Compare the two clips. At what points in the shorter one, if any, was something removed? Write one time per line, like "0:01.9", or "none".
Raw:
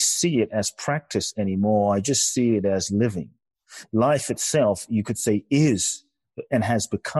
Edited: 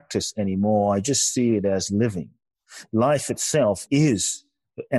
0:03.9